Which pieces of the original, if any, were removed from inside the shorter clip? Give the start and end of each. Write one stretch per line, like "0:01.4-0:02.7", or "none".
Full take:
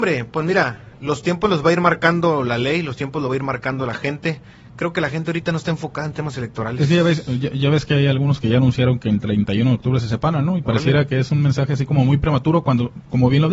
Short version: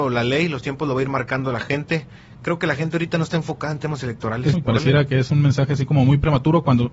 0:06.9-0:10.5